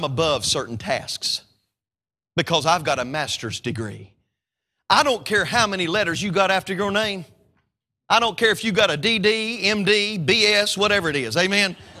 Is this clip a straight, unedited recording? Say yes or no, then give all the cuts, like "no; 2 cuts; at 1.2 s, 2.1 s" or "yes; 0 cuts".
yes; 0 cuts